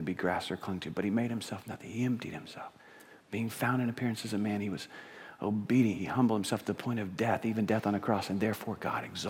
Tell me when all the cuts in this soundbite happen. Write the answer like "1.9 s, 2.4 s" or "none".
none